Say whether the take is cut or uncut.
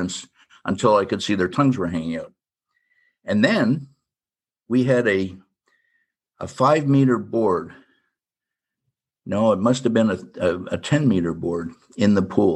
uncut